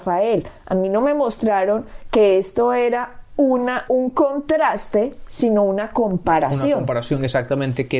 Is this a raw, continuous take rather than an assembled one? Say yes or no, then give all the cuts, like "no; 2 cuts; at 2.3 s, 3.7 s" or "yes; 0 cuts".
yes; 0 cuts